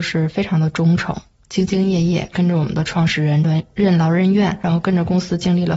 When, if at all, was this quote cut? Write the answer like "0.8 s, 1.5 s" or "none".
none

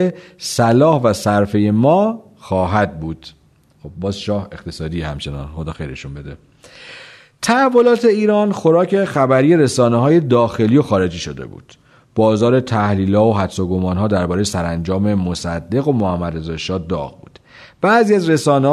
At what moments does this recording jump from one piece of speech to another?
none

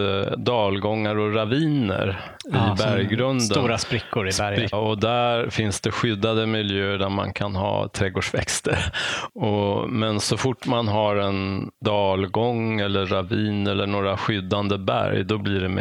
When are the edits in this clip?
4.7 s, 9.3 s, 11.7 s

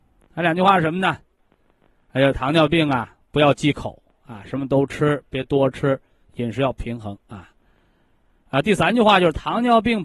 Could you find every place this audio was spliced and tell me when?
none

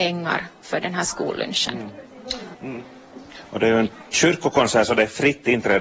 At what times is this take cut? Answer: 2.5 s

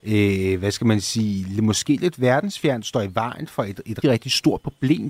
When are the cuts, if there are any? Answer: 4.0 s

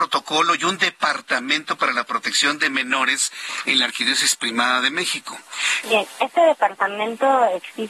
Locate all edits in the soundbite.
5.8 s

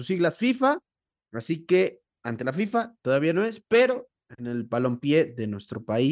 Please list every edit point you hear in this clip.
none

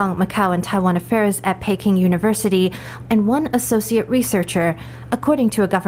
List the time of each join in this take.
3.1 s

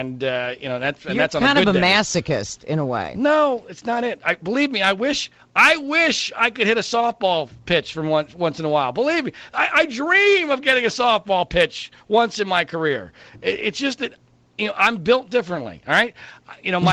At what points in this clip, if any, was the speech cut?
none

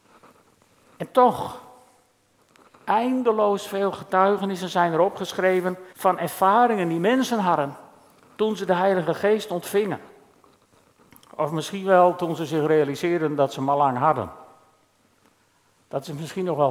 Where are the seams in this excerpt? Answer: 2.6 s, 5.9 s

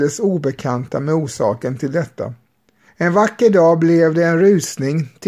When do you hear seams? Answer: 2.9 s

